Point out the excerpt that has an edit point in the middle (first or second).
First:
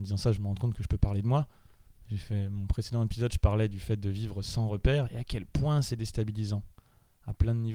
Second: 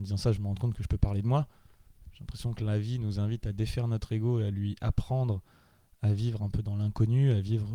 second